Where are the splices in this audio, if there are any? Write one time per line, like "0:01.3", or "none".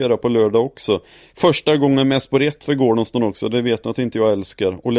none